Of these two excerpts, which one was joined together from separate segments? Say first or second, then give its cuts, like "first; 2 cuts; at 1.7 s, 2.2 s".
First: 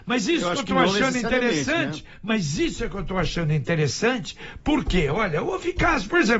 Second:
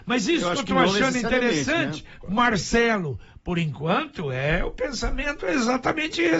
second; 1 cut; at 2.2 s